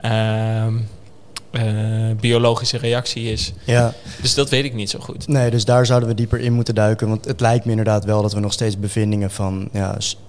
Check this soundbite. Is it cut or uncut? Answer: cut